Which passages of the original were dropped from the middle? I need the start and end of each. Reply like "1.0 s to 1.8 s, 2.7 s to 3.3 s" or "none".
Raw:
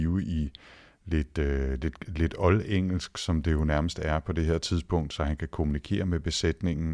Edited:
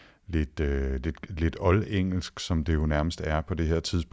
none